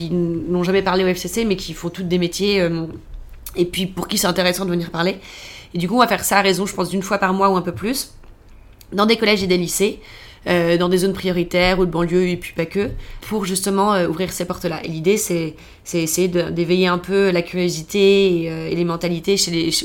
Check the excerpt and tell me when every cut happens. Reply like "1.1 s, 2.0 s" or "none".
13.2 s